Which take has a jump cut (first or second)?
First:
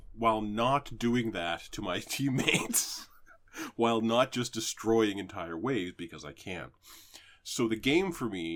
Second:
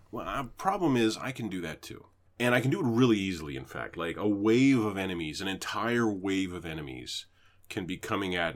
second